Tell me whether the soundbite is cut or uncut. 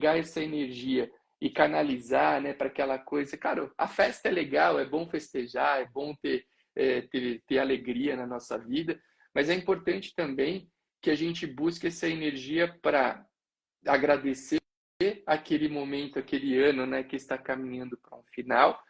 uncut